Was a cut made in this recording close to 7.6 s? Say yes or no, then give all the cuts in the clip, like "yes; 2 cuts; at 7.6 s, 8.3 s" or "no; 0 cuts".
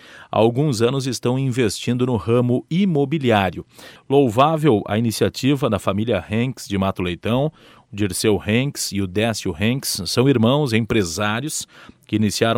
no; 1 cut; at 4.0 s